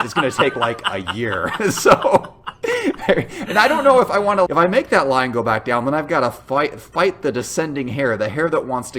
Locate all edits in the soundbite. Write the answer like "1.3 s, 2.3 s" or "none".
4.5 s